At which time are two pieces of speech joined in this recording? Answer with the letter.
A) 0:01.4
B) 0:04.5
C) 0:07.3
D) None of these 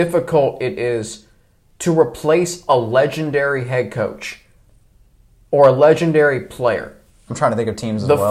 C